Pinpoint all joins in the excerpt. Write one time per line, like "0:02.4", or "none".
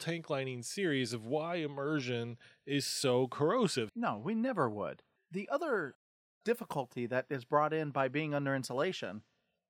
0:03.9